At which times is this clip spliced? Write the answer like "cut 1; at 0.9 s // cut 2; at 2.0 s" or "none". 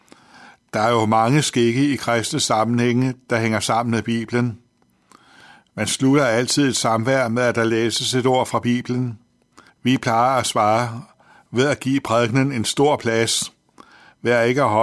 cut 1; at 9.7 s